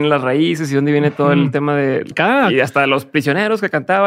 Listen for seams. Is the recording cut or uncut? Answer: cut